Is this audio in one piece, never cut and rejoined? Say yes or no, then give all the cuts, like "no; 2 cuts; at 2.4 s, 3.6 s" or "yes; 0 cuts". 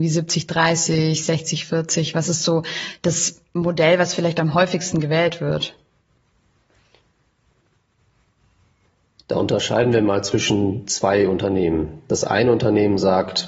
yes; 0 cuts